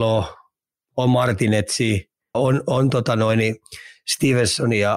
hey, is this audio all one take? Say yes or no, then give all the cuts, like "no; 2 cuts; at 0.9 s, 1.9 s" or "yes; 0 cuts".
no; 1 cut; at 2.3 s